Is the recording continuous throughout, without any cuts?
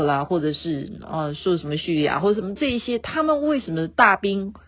yes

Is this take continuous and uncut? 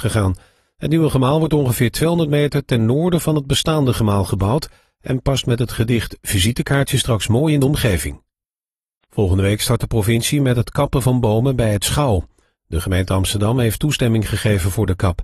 yes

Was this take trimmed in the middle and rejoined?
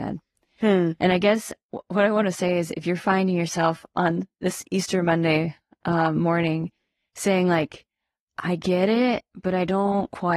no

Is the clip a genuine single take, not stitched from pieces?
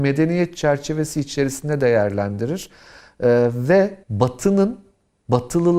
no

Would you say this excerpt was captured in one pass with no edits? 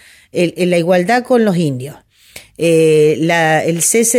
yes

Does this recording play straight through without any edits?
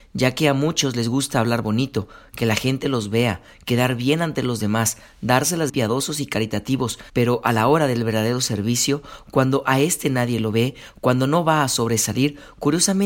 no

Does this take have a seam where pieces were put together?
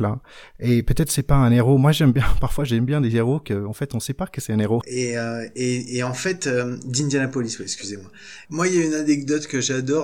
yes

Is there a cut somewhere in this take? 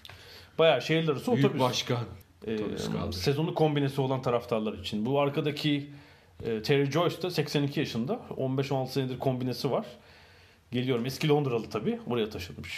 yes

